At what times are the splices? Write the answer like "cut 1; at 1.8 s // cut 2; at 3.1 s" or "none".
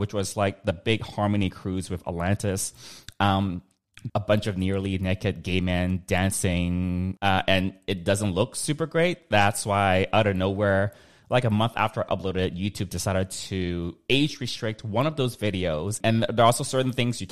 cut 1; at 4.1 s // cut 2; at 16.0 s